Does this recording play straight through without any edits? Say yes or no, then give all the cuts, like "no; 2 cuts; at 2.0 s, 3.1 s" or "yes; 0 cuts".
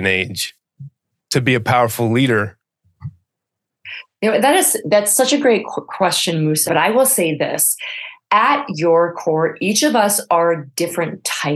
no; 1 cut; at 6.7 s